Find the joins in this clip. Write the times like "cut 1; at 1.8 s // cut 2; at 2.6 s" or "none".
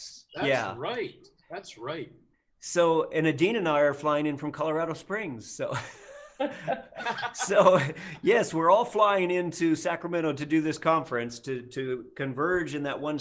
none

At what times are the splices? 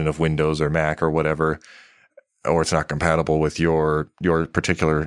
none

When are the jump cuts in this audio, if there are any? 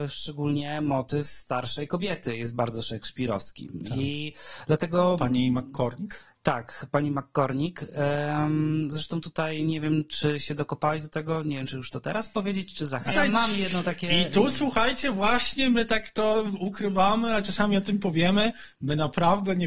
cut 1; at 13.1 s

